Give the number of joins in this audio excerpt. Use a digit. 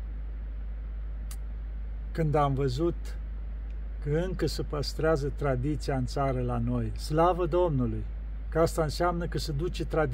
2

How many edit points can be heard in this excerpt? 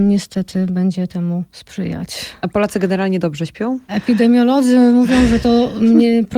1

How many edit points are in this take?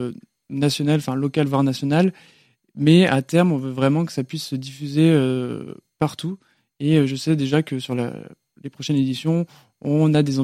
0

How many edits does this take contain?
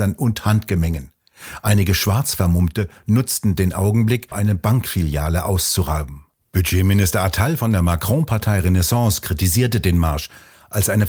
1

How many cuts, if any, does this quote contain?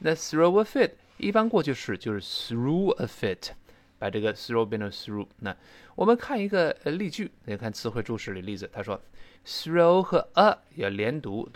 1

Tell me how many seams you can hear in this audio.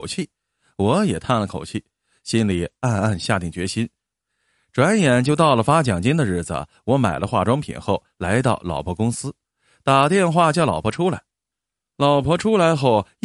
0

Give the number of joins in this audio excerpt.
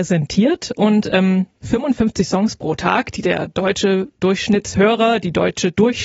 0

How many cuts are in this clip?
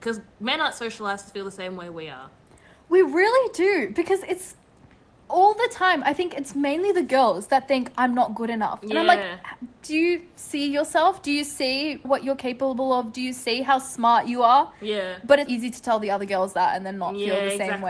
2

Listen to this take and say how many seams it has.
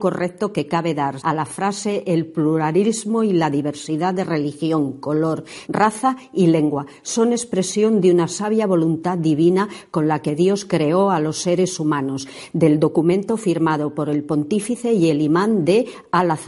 2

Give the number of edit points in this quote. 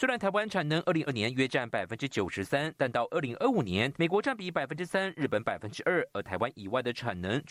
2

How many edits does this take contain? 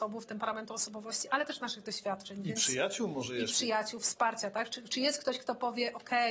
0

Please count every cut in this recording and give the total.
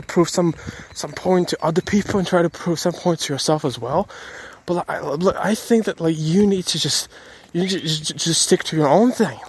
0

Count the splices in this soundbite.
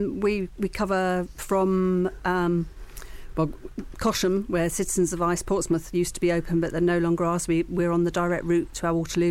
0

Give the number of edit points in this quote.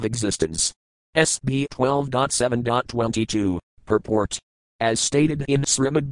1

